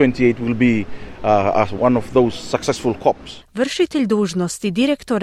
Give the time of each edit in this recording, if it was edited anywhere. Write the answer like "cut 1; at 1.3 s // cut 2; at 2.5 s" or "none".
cut 1; at 1.8 s // cut 2; at 3.4 s